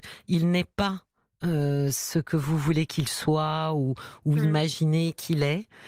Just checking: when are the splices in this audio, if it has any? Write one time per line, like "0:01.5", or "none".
none

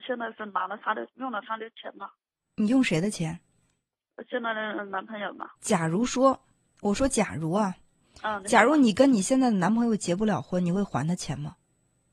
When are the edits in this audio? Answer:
0:05.6

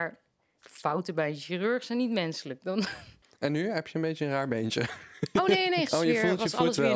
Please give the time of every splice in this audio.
0:05.9

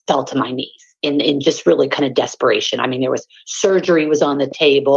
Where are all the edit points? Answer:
none

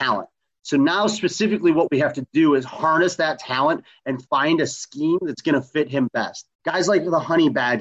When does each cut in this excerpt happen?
0:06.5

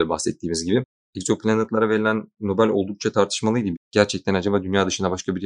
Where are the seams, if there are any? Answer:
0:03.7

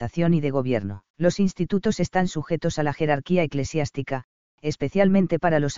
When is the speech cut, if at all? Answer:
0:01.1

